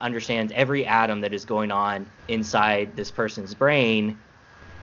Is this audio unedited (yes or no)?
no